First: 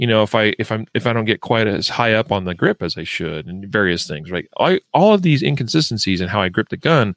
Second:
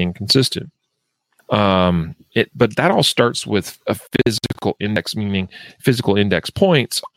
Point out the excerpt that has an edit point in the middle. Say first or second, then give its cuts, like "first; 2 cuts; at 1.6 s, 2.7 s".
second; 1 cut; at 1.4 s